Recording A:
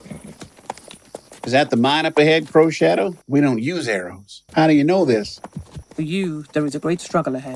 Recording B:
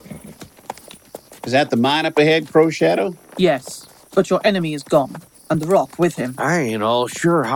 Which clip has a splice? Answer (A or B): A